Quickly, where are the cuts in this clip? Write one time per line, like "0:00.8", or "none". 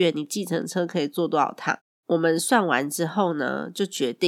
none